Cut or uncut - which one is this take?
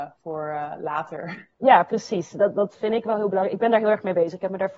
cut